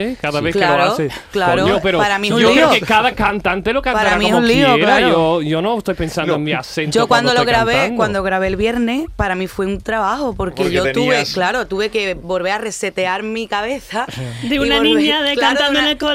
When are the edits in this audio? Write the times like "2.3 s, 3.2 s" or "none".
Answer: none